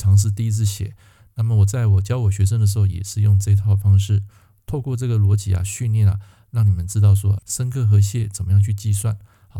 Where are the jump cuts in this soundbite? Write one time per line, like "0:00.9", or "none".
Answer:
0:07.4